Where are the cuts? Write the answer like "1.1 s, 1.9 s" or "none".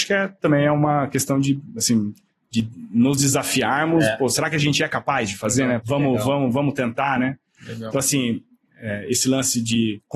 7.6 s

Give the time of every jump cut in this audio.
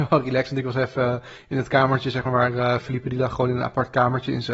none

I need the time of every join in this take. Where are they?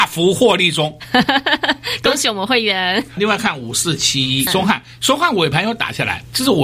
3.2 s, 4.5 s

